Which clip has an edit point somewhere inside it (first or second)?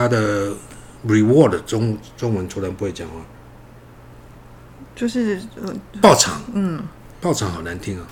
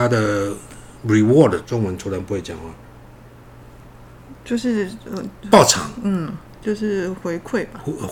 second